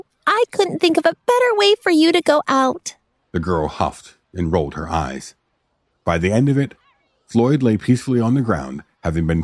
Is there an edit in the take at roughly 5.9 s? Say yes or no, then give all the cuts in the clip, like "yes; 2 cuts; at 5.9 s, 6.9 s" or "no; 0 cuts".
yes; 2 cuts; at 3.2 s, 5.9 s